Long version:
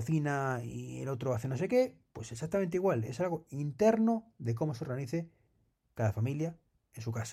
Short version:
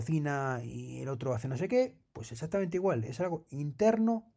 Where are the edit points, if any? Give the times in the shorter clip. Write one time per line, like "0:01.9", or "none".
none